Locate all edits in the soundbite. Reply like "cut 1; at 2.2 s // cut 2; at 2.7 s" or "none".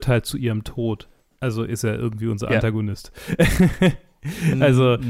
none